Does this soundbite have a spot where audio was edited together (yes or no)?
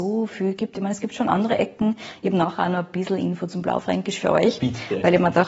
no